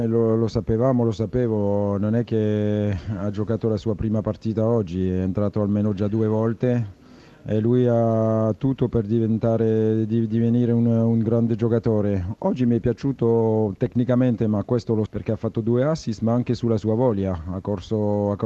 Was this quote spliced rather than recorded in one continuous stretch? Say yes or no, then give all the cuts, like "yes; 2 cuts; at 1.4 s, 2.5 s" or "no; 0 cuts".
yes; 1 cut; at 15.1 s